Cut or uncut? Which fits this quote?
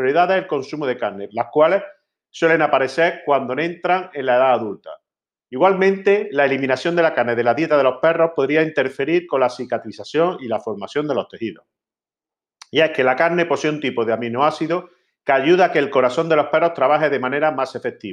cut